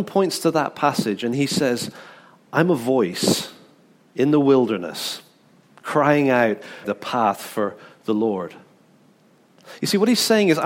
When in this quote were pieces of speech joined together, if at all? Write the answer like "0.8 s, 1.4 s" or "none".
6.8 s